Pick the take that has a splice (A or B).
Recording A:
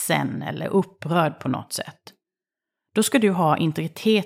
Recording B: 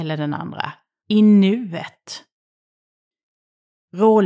B